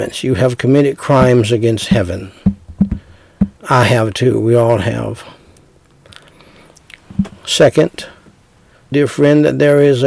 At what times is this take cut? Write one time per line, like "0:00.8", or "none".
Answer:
0:03.6
0:08.9